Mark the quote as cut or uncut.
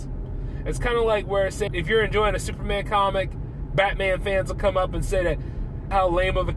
cut